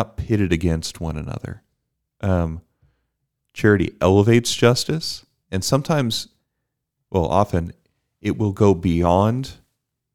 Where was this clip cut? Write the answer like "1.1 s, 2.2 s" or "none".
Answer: none